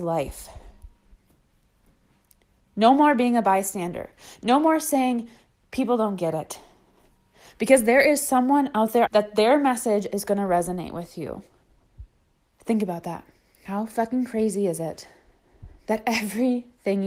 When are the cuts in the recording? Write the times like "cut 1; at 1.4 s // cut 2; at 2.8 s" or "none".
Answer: cut 1; at 9.1 s // cut 2; at 12.5 s